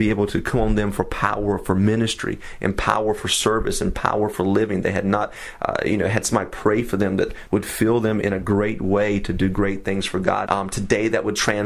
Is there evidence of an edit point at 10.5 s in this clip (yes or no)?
yes